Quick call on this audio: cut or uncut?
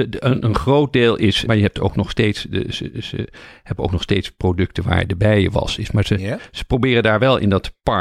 cut